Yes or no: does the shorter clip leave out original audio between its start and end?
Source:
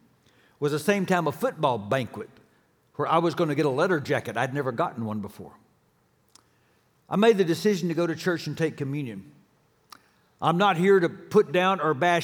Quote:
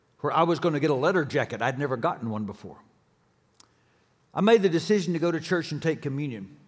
no